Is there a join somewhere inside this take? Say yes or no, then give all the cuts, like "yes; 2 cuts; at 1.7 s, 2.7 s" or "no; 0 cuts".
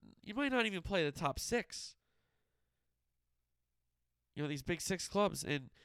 no; 0 cuts